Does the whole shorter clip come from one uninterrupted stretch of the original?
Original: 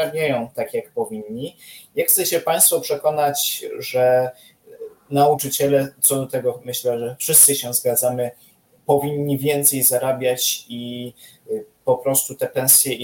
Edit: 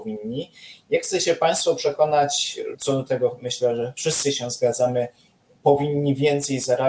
no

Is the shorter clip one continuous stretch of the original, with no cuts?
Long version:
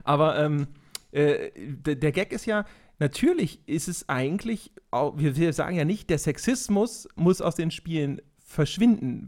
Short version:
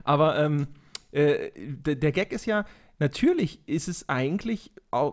yes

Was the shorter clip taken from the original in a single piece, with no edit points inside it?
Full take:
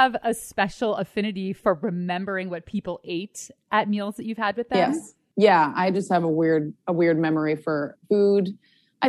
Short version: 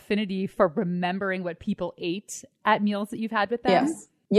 yes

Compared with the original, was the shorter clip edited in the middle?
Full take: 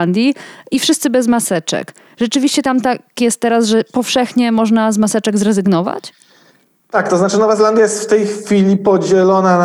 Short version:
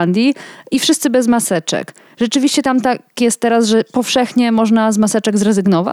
no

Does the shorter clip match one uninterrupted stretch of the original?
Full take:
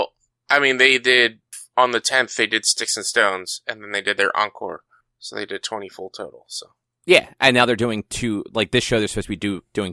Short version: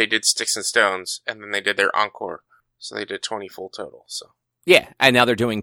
yes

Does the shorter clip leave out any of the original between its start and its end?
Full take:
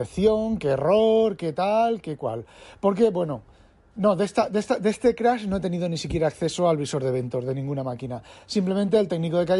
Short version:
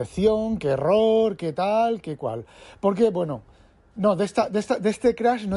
no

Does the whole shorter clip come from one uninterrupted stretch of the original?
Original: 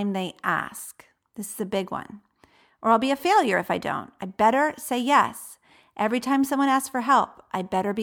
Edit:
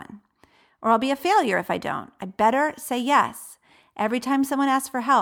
yes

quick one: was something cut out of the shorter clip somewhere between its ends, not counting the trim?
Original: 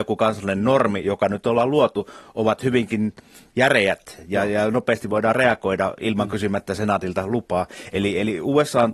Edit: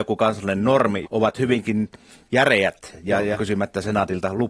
yes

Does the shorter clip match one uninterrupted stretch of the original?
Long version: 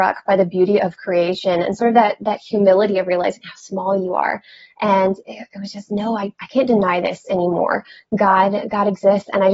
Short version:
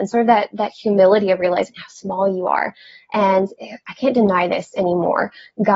no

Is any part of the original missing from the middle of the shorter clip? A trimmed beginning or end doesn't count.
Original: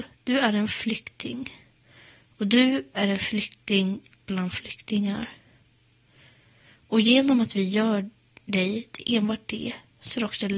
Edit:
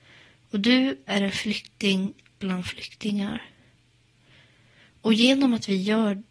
no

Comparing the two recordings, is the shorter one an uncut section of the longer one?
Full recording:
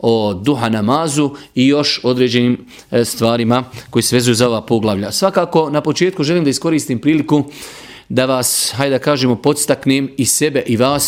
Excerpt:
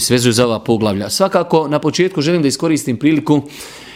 yes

